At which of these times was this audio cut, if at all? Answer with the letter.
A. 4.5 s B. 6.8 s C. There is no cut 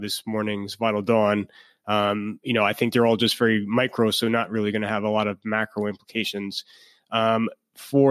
C